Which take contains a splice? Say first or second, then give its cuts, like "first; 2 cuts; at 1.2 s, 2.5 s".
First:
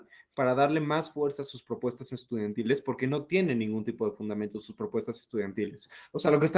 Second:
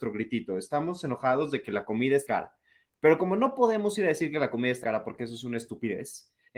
second; 2 cuts; at 2.3 s, 4.8 s